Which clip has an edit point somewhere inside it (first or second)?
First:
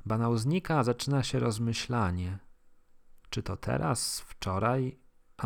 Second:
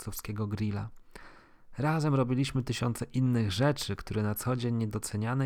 first